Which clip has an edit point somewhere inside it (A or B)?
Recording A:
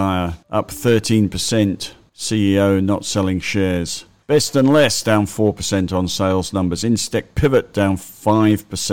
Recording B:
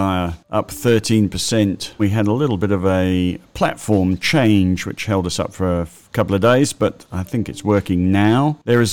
B